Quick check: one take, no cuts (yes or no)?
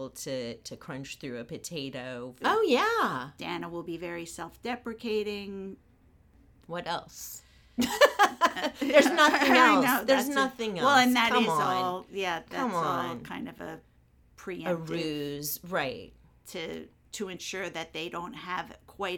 no